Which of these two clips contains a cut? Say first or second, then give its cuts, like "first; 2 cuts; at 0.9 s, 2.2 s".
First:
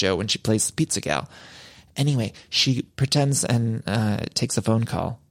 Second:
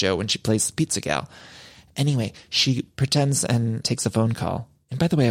second; 1 cut; at 3.8 s